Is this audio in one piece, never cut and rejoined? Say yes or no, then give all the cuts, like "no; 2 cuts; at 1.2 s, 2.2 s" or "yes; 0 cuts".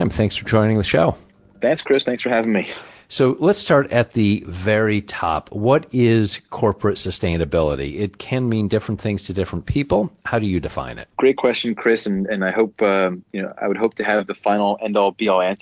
no; 1 cut; at 11.1 s